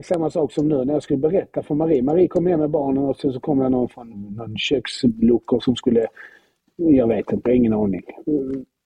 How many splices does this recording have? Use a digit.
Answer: 2